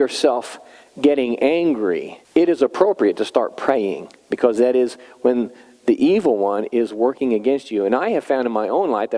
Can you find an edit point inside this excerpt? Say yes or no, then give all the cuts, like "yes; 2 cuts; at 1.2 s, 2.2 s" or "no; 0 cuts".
yes; 1 cut; at 2.2 s